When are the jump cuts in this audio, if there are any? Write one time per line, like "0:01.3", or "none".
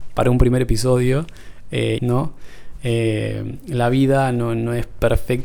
0:02.0

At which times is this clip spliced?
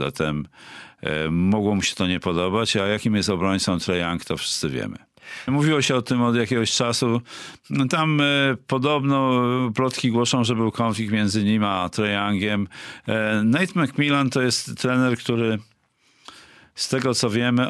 0:05.5

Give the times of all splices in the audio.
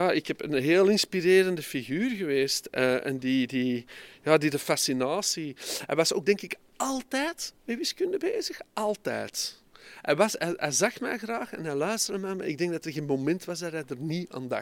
none

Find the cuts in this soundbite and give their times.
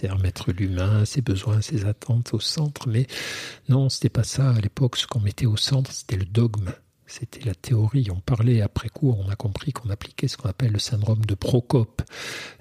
0:01.1

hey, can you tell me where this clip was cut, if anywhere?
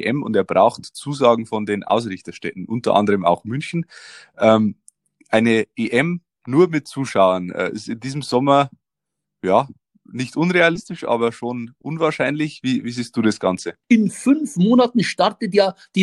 0:13.8

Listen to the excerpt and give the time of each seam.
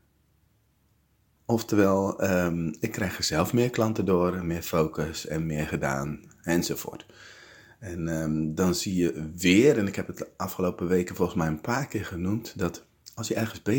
none

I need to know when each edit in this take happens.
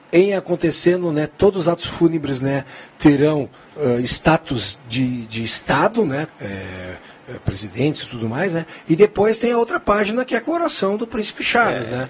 0:06.3

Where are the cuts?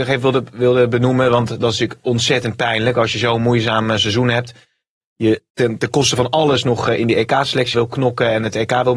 0:05.5
0:07.7

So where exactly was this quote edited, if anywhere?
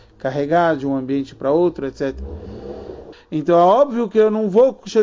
0:03.1

